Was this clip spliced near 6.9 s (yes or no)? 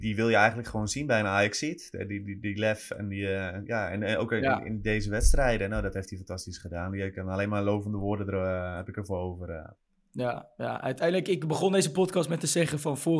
no